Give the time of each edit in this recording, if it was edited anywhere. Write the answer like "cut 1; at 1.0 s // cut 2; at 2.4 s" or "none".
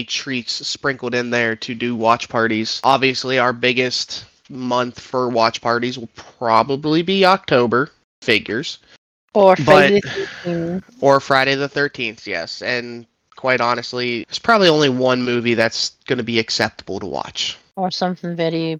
cut 1; at 14.2 s